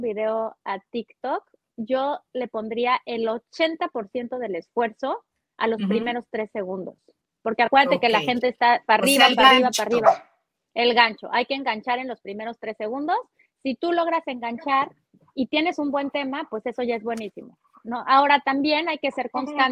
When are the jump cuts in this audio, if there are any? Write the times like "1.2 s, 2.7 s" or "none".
none